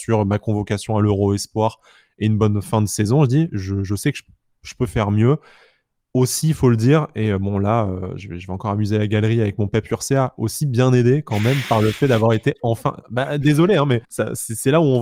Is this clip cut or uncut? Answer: cut